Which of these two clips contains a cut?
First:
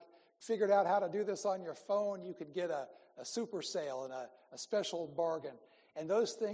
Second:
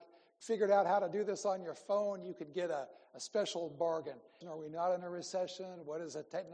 second; 2 cuts; at 3.0 s, 4.4 s

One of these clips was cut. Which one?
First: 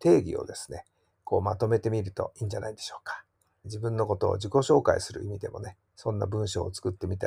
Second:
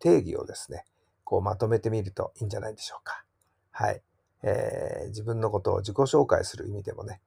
first; 1 cut; at 3.6 s

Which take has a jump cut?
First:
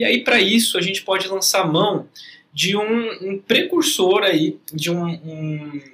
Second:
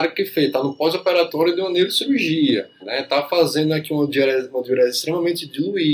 second; 1 cut; at 2.8 s

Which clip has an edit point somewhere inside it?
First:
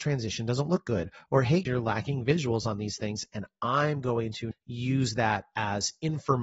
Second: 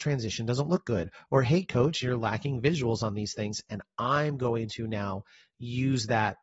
first; 2 cuts; at 1.7 s, 4.5 s

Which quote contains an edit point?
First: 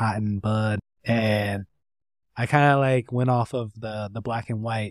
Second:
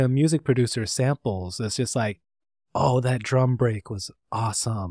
first; 1 cut; at 1.0 s

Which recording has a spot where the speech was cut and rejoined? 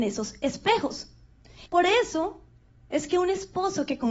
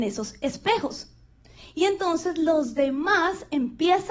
first; 1 cut; at 1.7 s

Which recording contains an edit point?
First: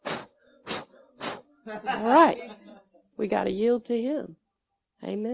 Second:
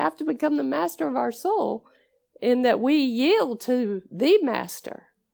first; 1 cut; at 3.1 s

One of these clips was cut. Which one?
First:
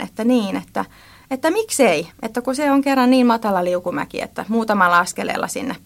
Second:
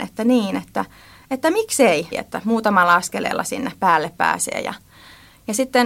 second; 1 cut; at 2.1 s

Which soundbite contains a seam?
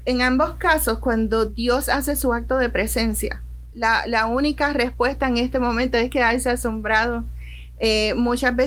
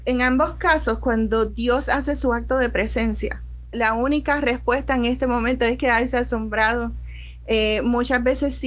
second; 1 cut; at 3.7 s

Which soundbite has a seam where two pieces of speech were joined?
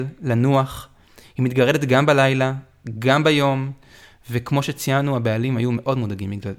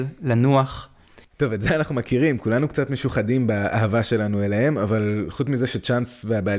second; 1 cut; at 1.2 s

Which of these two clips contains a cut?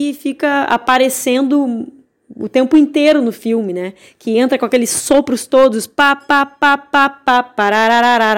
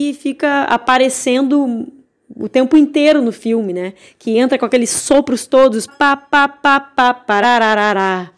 second; 2 cuts; at 5.9 s, 7.4 s

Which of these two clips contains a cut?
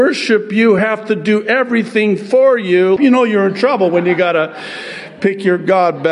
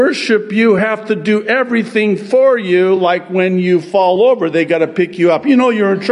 first; 1 cut; at 3.0 s

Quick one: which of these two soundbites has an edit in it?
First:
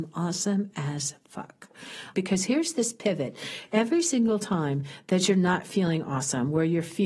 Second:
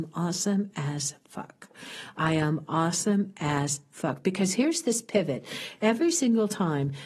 first; 1 cut; at 2.1 s

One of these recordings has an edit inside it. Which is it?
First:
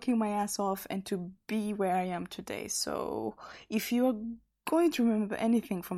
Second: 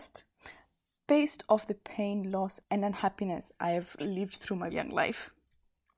second; 2 cuts; at 2.6 s, 4.7 s

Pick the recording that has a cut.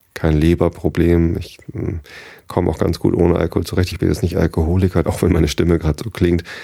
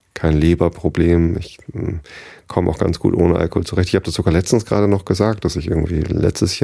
first; 2 cuts; at 3.9 s, 5.0 s

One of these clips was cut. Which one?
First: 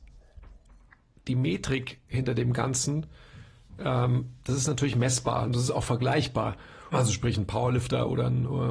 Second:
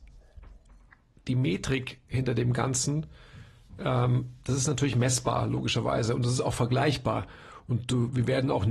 first; 2 cuts; at 5.5 s, 6.9 s

